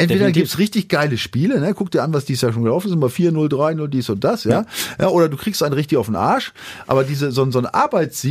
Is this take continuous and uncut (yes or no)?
yes